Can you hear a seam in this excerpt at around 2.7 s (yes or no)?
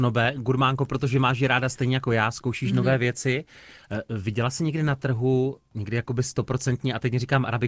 no